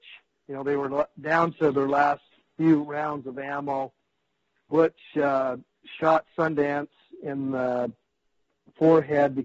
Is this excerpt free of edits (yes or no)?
yes